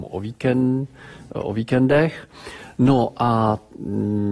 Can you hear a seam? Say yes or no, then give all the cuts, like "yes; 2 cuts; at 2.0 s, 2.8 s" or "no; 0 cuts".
no; 0 cuts